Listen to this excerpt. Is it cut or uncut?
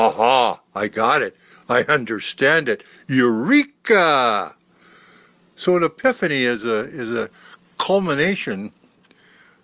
uncut